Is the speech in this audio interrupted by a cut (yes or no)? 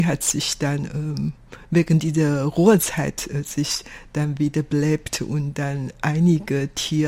no